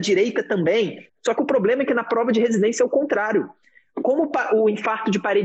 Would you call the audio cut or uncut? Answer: cut